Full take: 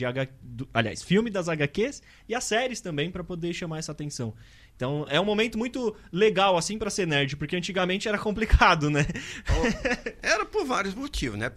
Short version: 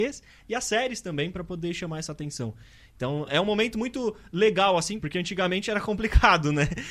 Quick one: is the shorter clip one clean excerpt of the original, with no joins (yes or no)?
no